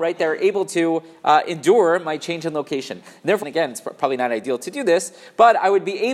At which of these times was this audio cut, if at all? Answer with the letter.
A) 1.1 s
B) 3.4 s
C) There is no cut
B